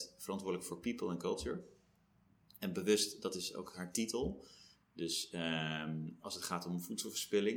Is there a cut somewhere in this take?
yes; 2 cuts; at 4.7 s, 6.2 s

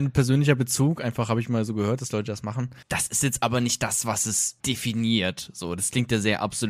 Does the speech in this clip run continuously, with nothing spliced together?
no; 1 cut; at 2.8 s

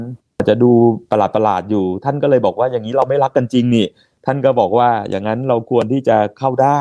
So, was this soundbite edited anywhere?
no; 0 cuts

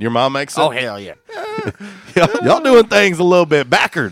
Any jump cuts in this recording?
yes; 2 cuts; at 1.1 s, 2.4 s

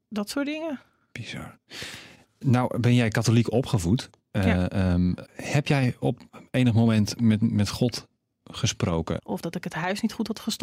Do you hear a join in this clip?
yes; 2 cuts; at 5.2 s, 9.2 s

